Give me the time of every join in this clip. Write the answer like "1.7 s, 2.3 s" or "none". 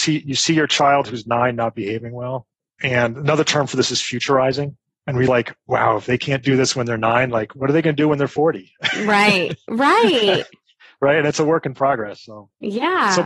none